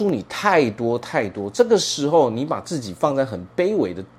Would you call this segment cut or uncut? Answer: uncut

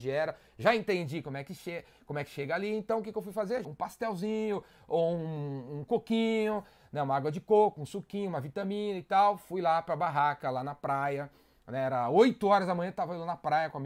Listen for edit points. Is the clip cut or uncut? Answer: cut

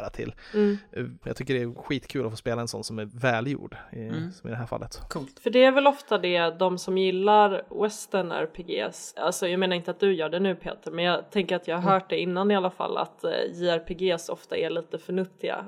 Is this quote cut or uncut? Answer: cut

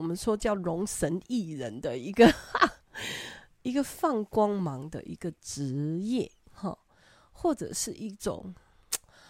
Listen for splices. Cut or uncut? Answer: uncut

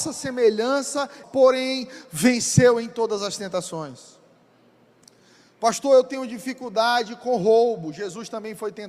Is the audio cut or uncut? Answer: cut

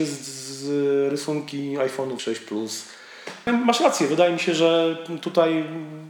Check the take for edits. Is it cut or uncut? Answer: cut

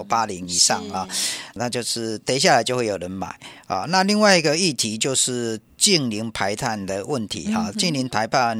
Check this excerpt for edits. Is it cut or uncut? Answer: cut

